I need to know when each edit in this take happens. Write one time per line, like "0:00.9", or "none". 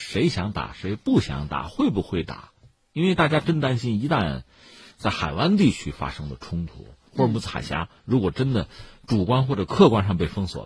0:07.1